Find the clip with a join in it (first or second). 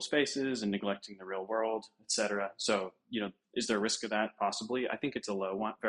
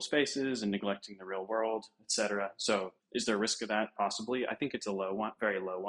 second